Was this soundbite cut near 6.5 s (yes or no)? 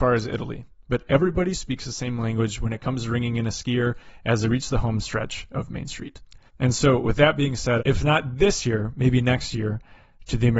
yes